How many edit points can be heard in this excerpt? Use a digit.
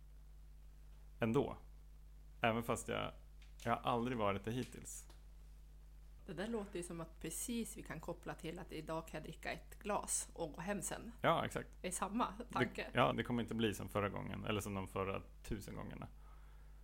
2